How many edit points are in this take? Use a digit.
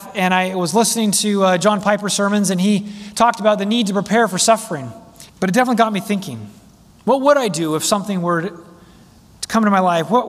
1